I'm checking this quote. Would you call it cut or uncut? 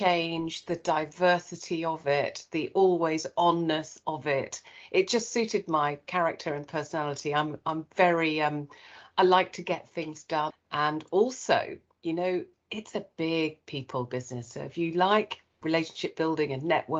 cut